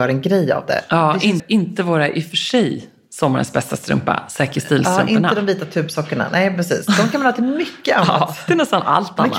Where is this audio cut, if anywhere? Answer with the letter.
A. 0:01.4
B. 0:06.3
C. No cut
A